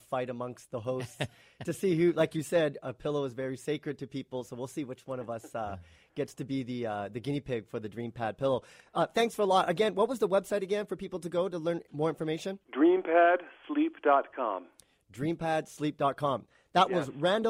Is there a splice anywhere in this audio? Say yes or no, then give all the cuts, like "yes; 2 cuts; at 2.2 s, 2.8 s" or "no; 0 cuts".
yes; 1 cut; at 12.6 s